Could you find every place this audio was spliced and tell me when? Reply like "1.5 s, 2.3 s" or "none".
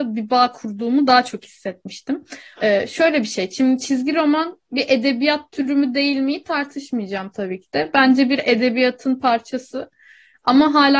2.6 s